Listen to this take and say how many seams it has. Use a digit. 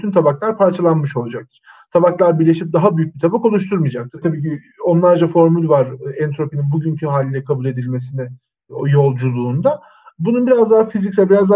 1